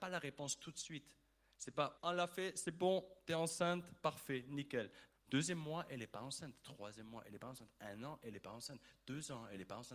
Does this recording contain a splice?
yes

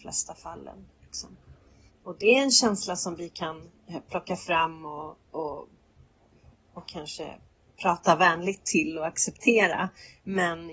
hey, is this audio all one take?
no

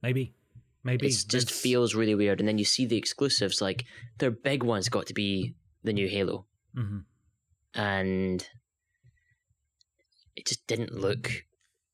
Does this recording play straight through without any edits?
yes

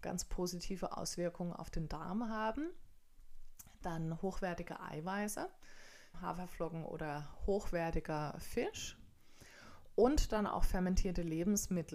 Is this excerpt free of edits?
no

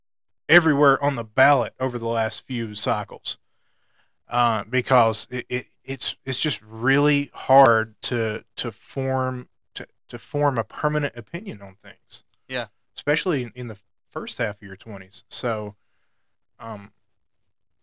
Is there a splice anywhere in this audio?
no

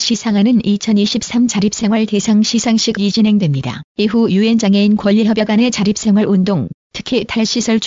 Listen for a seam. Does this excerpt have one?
yes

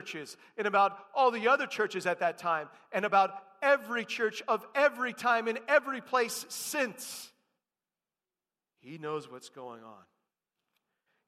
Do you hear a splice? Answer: yes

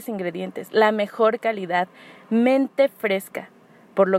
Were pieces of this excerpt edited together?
no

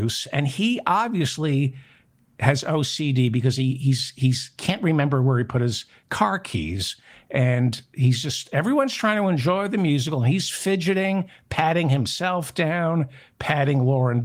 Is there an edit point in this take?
no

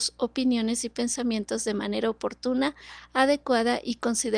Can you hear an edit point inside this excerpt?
no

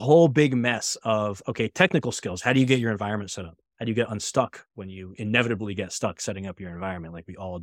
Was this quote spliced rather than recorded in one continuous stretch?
no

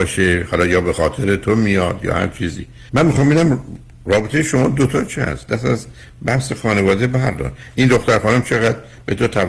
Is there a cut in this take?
yes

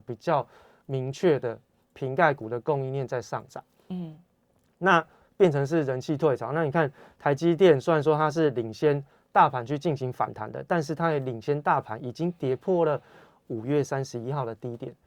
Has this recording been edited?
no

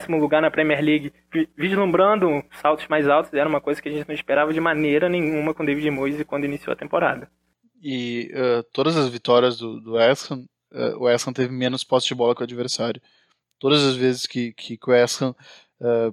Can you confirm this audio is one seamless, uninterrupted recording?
yes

